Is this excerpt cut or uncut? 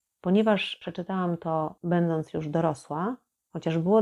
uncut